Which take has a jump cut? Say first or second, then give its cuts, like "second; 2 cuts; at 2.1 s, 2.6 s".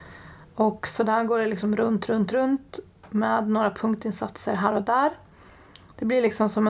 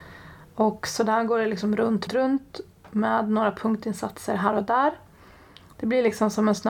second; 1 cut; at 2.1 s